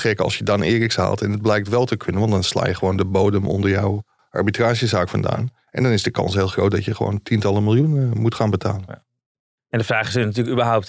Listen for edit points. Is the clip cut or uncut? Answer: uncut